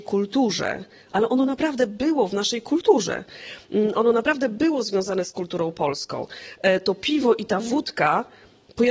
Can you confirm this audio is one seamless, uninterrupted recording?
yes; 0 cuts

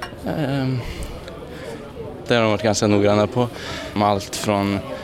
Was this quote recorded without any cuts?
no; 2 cuts; at 2.3 s, 4.0 s

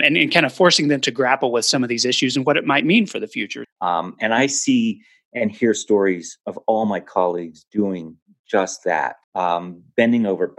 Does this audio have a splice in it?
yes; 2 cuts; at 3.6 s, 9.2 s

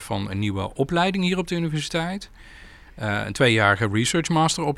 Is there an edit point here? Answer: no; 0 cuts

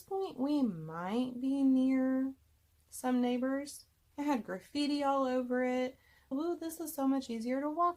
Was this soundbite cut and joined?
yes; 2 cuts; at 4.1 s, 6.3 s

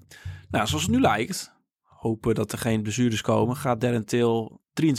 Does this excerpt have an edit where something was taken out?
no; 0 cuts

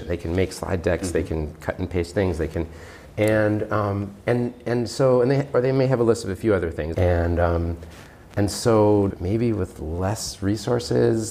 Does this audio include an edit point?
yes; 2 cuts; at 6.9 s, 9.1 s

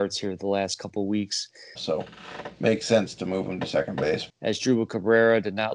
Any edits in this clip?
yes; 2 cuts; at 1.8 s, 4.3 s

